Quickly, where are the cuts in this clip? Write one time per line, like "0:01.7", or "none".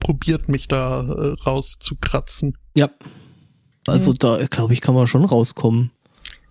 0:03.9